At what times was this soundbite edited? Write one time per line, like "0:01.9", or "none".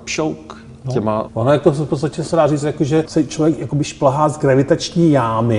0:01.3
0:03.1